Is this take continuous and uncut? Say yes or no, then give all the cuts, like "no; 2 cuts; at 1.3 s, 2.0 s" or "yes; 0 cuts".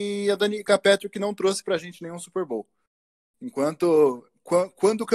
yes; 0 cuts